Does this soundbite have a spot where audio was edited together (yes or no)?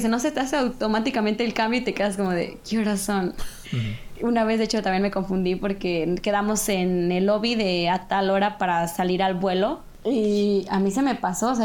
yes